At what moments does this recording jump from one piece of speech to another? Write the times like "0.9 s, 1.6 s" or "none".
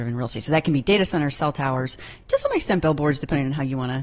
none